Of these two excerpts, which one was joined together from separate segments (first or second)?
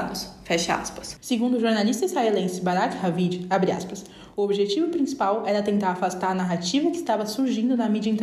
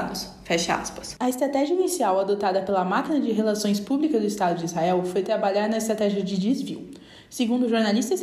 first